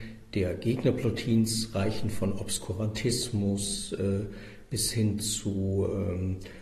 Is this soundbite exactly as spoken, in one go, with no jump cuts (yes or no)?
yes